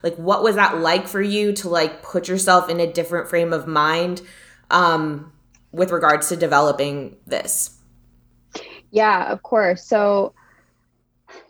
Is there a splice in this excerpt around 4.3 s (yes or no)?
no